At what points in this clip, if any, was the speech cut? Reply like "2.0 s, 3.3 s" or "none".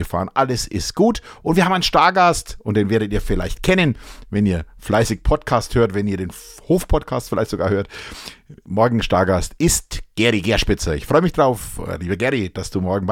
none